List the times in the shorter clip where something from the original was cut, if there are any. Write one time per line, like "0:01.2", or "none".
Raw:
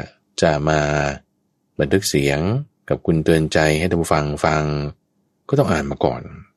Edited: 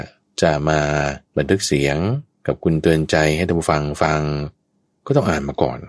0:01.3

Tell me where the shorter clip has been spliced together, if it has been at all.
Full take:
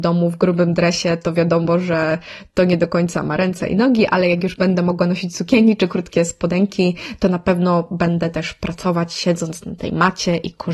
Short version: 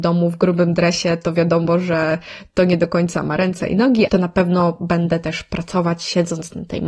0:04.1

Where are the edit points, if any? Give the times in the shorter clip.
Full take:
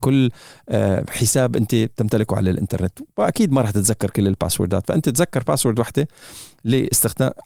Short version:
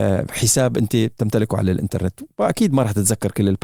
none

